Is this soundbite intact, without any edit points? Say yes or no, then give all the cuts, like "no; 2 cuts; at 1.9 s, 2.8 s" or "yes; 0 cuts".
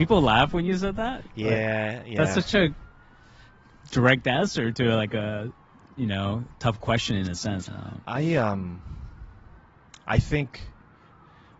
no; 1 cut; at 7.7 s